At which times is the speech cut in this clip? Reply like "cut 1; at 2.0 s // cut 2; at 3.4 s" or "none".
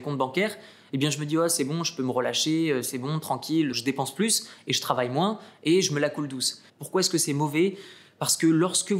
cut 1; at 3.7 s // cut 2; at 6.7 s